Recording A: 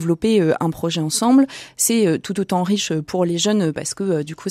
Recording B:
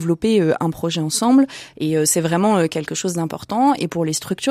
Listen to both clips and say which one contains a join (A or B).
B